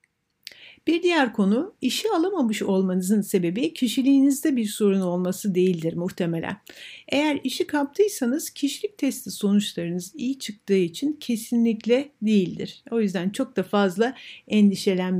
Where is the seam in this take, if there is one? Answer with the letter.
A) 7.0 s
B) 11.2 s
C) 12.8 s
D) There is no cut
A